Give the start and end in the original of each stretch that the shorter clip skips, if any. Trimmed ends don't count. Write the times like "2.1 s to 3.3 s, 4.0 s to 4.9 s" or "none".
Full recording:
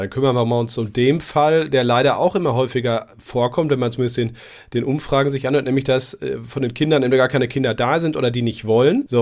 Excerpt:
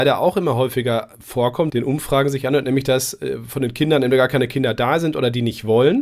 3.7 s to 4.7 s